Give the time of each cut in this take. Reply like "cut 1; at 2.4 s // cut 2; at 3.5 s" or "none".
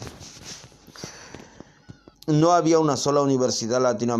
cut 1; at 2.1 s

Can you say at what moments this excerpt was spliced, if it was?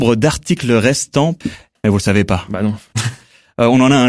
cut 1; at 1.8 s // cut 2; at 2.9 s

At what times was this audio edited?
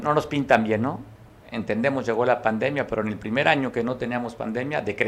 cut 1; at 1.4 s

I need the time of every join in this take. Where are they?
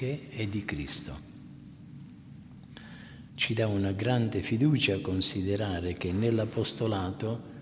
cut 1; at 3.3 s

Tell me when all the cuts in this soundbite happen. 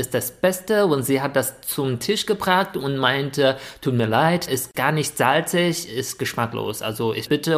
cut 1; at 4.5 s

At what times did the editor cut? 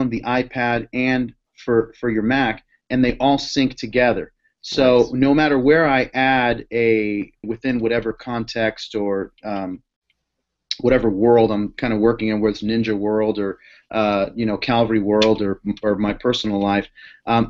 cut 1; at 7.4 s

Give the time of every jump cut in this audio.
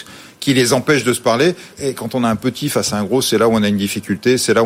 cut 1; at 1.7 s

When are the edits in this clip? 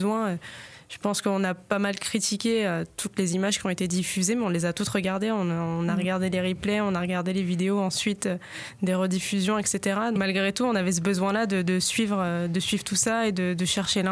cut 1; at 10.2 s

